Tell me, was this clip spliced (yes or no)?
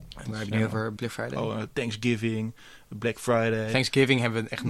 yes